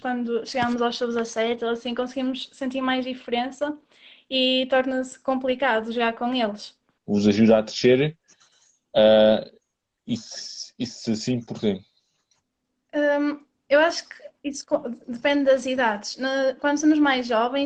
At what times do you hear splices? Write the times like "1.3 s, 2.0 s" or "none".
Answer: 7.0 s